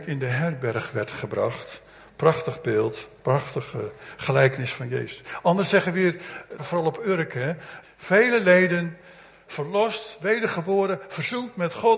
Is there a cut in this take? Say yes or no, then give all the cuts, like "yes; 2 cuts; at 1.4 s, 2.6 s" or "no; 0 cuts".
yes; 3 cuts; at 6.6 s, 7.8 s, 9.5 s